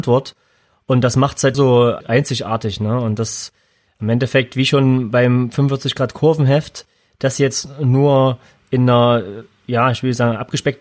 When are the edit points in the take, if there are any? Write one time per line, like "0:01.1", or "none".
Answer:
0:01.5